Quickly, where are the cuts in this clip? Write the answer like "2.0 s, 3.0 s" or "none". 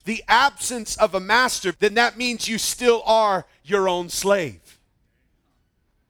1.7 s